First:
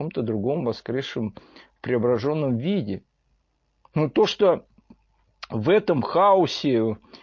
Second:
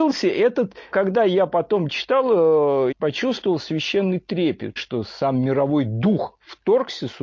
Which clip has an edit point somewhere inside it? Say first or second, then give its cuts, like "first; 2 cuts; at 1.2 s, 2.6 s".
second; 3 cuts; at 0.9 s, 2.9 s, 4.8 s